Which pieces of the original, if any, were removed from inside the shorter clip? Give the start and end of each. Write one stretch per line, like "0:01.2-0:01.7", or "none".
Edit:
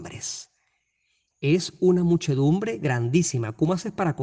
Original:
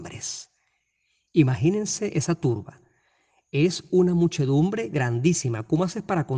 0:01.3-0:03.4